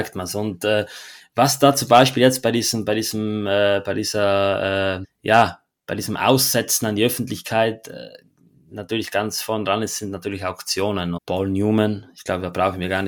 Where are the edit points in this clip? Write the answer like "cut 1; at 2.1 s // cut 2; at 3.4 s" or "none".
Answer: cut 1; at 5.0 s // cut 2; at 11.2 s